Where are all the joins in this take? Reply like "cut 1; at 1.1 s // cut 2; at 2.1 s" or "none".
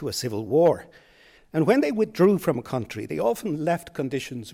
cut 1; at 1.4 s